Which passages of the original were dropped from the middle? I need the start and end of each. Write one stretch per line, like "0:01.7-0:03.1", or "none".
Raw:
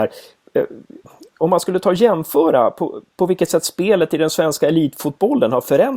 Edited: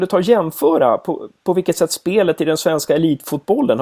none